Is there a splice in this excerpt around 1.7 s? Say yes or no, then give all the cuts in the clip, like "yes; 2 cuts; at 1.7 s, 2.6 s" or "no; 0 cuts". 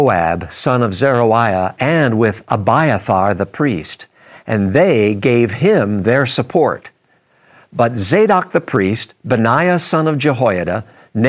no; 0 cuts